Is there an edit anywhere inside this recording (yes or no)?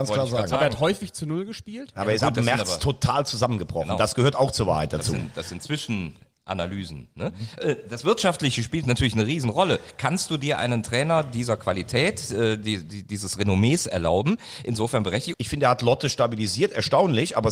yes